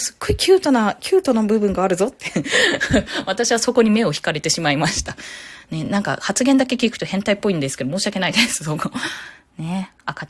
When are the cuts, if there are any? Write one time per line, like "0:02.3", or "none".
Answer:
none